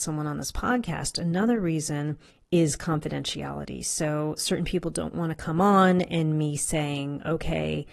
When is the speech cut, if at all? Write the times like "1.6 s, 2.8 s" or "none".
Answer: none